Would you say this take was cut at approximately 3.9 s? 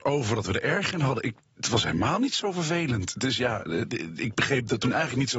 yes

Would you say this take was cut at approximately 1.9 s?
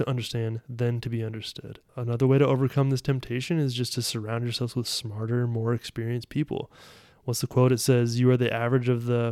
yes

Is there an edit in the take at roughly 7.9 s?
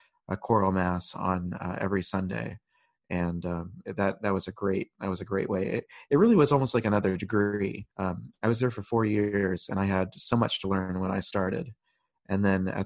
yes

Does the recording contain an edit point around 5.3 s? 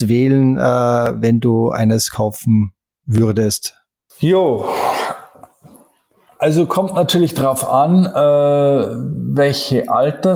no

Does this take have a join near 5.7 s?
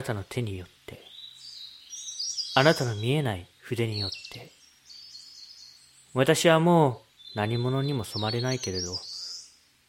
no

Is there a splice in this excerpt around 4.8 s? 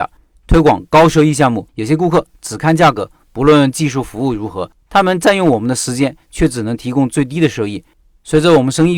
yes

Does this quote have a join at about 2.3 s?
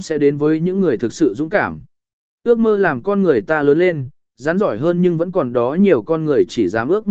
yes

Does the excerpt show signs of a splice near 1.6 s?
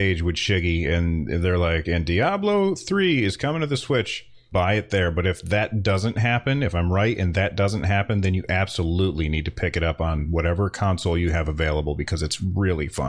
no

